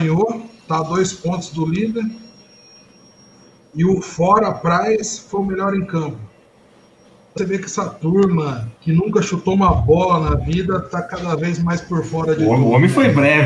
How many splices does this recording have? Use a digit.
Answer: 2